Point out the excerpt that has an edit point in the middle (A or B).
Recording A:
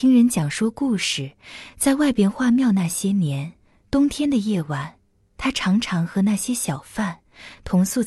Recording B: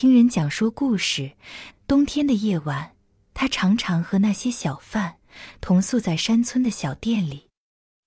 B